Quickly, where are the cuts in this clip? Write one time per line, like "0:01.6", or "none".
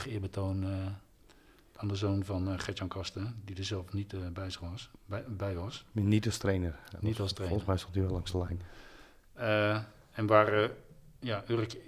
none